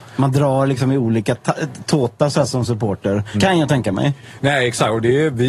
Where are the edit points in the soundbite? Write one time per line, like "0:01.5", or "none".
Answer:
0:03.3